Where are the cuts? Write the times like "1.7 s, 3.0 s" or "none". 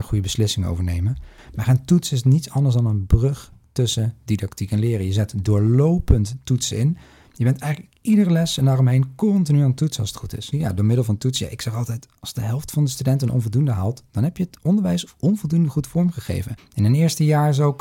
10.5 s, 16.6 s

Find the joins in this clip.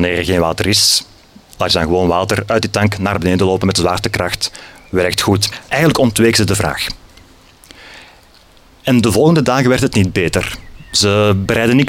5.7 s

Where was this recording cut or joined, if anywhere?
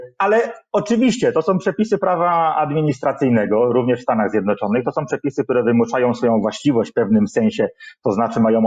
none

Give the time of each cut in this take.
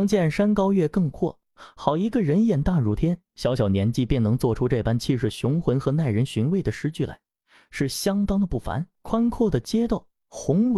9.0 s

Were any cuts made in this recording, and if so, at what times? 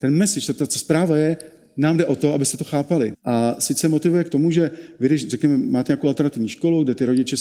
3.1 s

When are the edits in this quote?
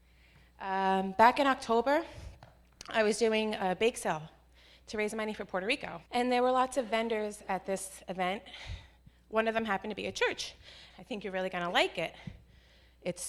6.1 s, 10.9 s

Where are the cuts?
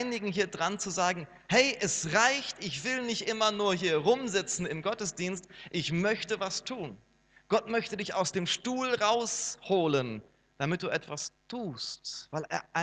none

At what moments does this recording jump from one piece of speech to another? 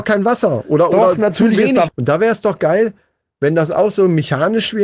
1.9 s

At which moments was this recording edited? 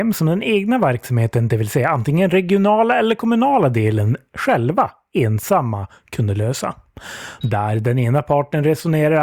7.4 s

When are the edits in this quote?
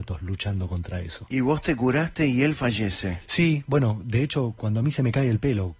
none

